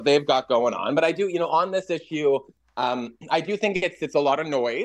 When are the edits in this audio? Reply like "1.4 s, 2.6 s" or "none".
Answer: none